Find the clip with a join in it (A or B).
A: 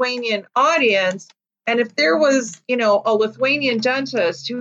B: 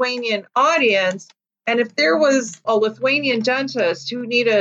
B